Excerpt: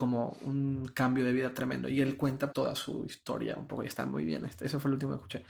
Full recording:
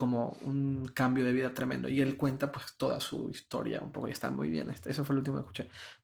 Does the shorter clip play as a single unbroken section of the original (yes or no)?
no